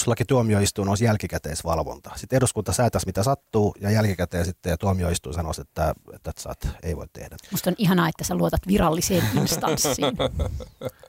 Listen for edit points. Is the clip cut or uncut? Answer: cut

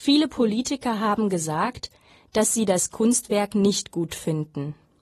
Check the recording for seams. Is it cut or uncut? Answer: uncut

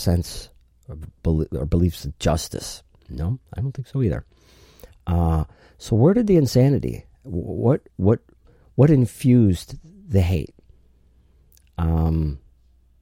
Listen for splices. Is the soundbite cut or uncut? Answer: uncut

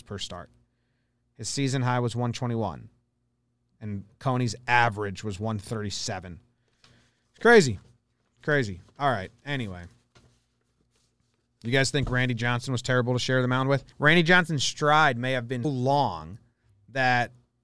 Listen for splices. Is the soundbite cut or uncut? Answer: cut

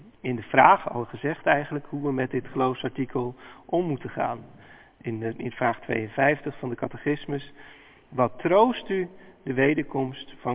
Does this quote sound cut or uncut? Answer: uncut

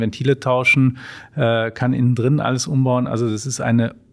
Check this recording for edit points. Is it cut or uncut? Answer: uncut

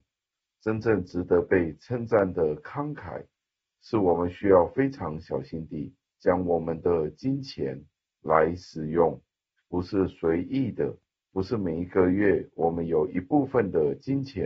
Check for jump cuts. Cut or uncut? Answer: uncut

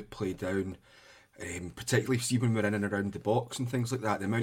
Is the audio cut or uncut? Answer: uncut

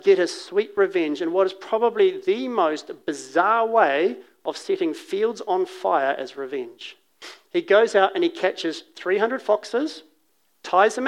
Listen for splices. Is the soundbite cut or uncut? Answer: uncut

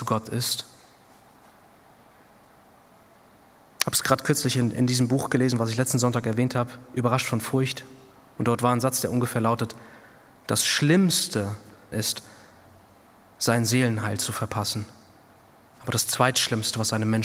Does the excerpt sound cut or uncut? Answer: cut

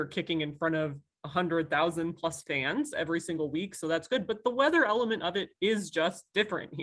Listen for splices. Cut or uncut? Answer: uncut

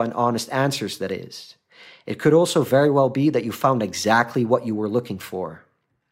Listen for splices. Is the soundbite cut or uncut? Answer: uncut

